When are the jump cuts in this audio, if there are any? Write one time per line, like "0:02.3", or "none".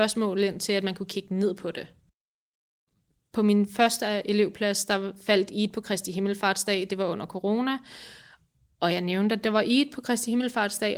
none